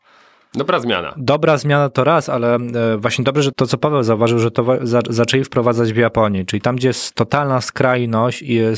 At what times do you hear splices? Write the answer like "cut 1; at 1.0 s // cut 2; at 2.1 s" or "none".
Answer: cut 1; at 3.5 s

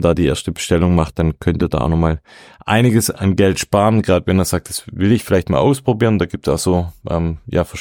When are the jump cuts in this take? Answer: none

